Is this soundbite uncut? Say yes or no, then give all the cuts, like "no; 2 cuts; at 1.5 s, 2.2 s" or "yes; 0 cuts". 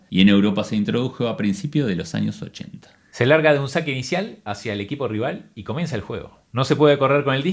yes; 0 cuts